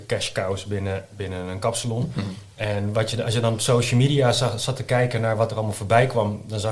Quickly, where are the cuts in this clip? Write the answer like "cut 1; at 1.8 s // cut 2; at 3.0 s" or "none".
none